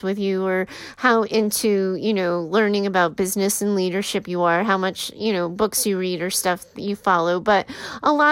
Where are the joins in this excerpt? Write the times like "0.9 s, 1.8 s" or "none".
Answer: none